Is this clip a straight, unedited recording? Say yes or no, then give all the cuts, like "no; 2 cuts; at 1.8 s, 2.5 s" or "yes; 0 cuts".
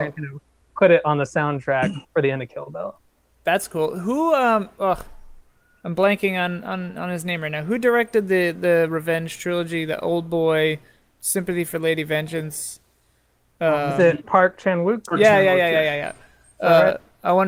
yes; 0 cuts